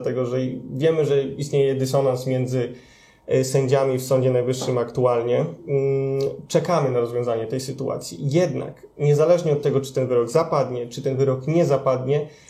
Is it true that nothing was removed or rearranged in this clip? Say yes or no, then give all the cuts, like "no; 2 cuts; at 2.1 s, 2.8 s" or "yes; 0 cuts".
yes; 0 cuts